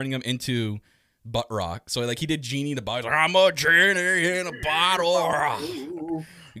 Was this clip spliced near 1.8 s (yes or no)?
no